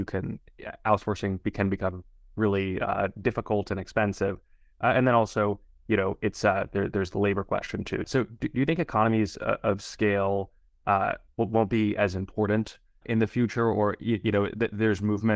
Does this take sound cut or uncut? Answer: cut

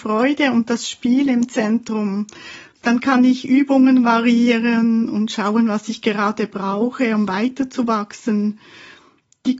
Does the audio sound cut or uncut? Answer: uncut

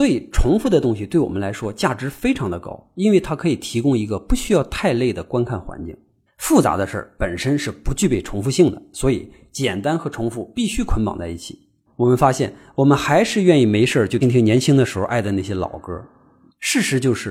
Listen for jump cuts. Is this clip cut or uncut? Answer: cut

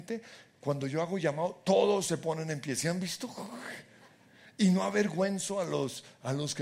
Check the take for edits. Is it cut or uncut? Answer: uncut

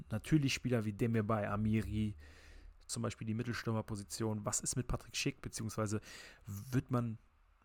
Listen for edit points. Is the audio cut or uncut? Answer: cut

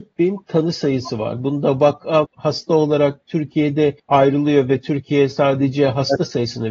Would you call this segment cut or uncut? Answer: cut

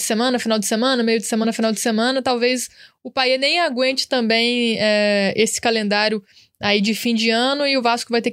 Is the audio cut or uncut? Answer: uncut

